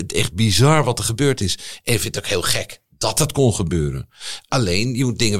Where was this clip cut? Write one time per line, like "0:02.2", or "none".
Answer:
none